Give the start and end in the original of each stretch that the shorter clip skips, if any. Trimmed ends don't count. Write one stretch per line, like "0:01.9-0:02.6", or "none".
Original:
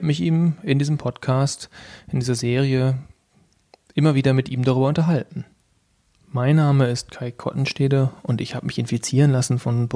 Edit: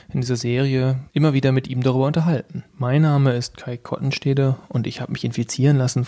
0:03.1-0:03.9
0:05.5-0:06.2